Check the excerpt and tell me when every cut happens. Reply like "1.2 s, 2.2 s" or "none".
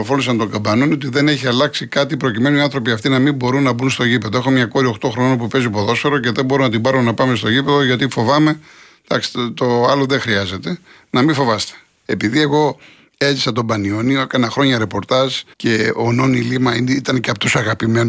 12.0 s, 15.5 s